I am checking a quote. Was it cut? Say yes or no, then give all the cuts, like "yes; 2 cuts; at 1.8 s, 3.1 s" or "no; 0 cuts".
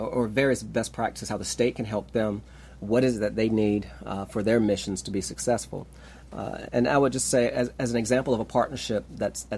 yes; 1 cut; at 6.7 s